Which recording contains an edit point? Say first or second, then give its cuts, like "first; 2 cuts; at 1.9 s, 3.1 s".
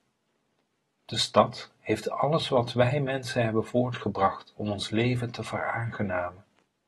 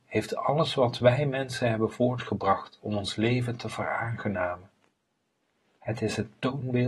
first; 1 cut; at 1.7 s